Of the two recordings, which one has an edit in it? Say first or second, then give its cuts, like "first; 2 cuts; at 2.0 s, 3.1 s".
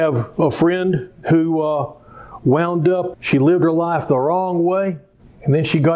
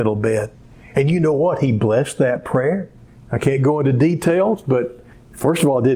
first; 1 cut; at 3.1 s